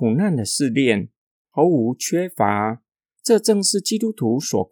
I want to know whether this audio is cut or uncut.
cut